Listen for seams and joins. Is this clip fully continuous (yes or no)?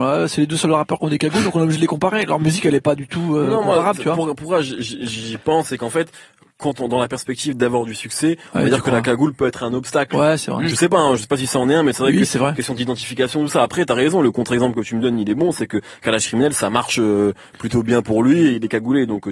yes